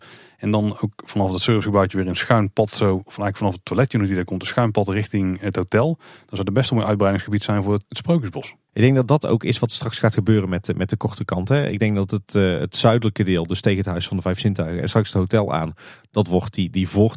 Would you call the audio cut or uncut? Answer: uncut